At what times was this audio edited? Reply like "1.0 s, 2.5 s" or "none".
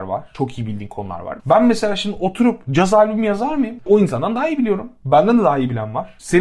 1.4 s, 3.8 s